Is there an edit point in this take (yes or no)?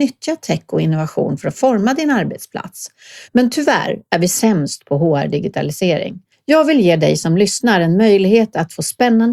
yes